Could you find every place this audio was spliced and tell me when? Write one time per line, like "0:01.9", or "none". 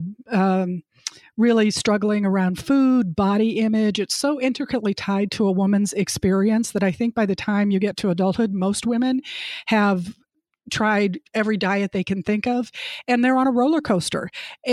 none